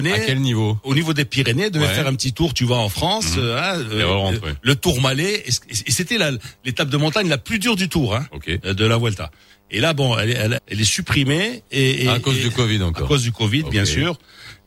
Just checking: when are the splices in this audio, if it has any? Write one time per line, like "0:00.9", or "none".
0:10.6